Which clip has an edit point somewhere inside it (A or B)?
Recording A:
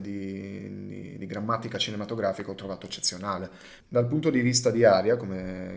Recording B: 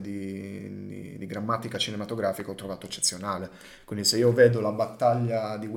A